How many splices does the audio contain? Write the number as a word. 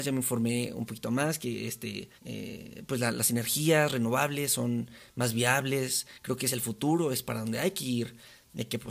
one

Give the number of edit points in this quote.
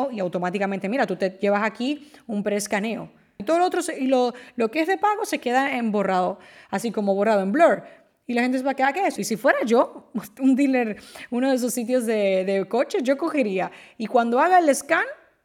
two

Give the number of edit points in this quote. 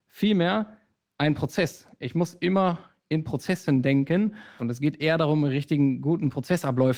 one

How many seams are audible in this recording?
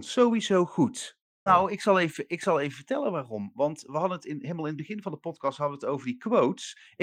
one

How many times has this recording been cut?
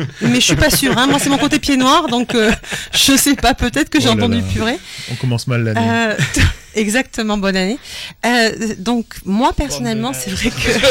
zero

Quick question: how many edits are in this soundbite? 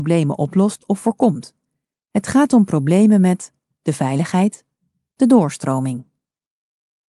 zero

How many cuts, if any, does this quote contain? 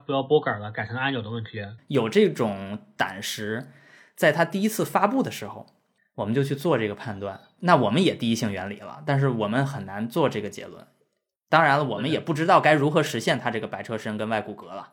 two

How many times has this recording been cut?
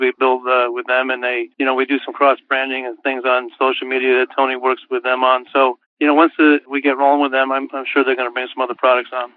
one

